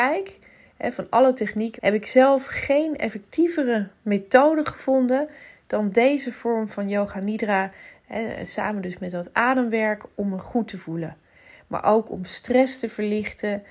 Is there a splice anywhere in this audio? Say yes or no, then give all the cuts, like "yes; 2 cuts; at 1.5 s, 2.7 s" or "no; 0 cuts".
yes; 1 cut; at 1.8 s